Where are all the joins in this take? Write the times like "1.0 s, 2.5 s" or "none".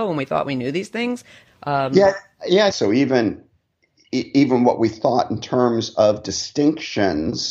1.4 s, 2.7 s